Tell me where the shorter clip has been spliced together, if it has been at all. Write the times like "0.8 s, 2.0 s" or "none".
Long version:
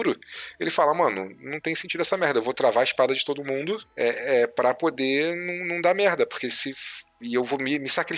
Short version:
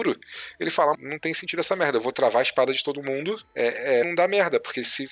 0.9 s, 4.0 s